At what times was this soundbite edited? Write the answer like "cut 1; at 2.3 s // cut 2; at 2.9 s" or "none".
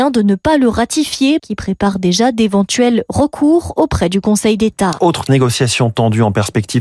cut 1; at 1.4 s // cut 2; at 5.0 s